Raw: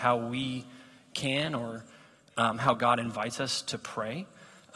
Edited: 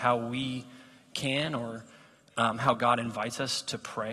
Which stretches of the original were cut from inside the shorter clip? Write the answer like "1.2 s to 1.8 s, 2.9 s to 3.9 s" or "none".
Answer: none